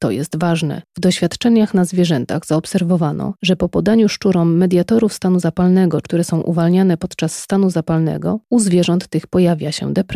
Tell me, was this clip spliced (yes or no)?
yes